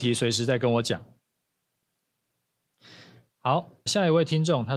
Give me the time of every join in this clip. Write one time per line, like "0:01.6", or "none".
0:03.9

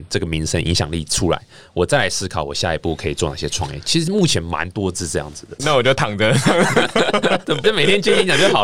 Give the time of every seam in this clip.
0:05.6
0:07.6

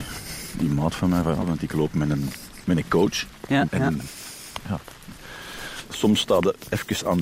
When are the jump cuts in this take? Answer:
0:01.4
0:03.6

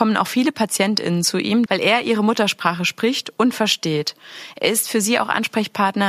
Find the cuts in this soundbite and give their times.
0:01.7

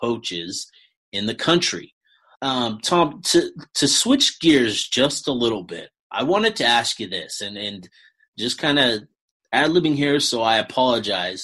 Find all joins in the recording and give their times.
0:02.3

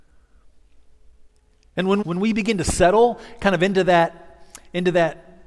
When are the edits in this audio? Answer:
0:02.0

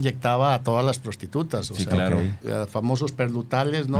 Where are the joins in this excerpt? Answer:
0:02.4

